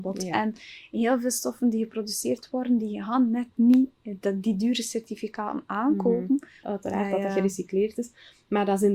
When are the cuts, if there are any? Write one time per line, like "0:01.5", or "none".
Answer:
0:06.6